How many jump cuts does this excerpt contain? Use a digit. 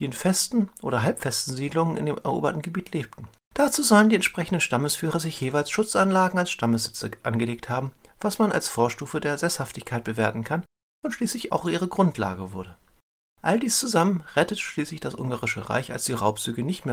1